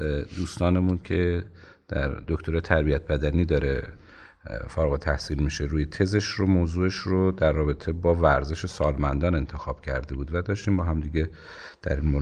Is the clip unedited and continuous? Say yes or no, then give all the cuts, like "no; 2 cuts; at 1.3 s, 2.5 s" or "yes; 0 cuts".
yes; 0 cuts